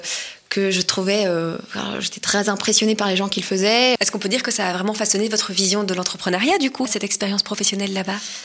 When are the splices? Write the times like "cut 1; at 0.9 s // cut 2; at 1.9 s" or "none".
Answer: cut 1; at 4.0 s // cut 2; at 6.9 s